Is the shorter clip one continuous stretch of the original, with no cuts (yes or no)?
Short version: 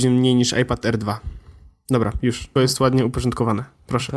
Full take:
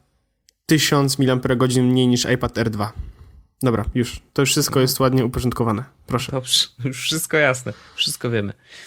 no